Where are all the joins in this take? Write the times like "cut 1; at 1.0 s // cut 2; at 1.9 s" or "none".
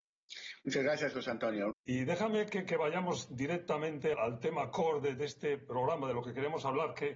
cut 1; at 1.7 s // cut 2; at 4.1 s